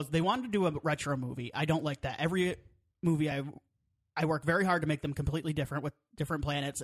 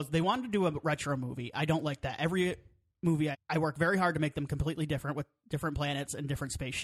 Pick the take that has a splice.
second; 1 cut; at 3.3 s

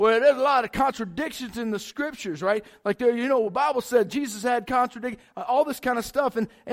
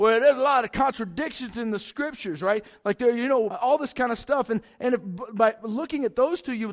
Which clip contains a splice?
second; 1 cut; at 3.5 s

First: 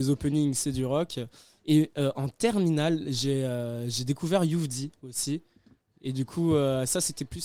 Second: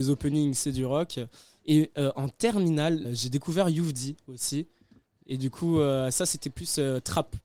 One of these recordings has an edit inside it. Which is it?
second; 1 cut; at 3.0 s

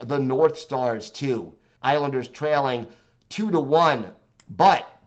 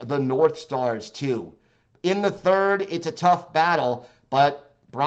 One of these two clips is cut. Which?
first; 1 cut; at 1.8 s

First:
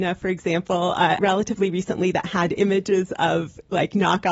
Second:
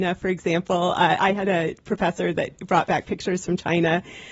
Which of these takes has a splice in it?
first; 1 cut; at 1.2 s

